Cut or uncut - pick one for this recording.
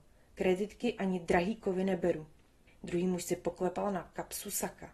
cut